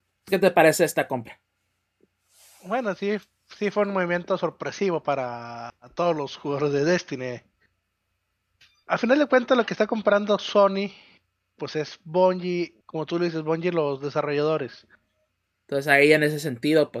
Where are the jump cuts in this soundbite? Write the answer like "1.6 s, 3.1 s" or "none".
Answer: 12.8 s, 15.4 s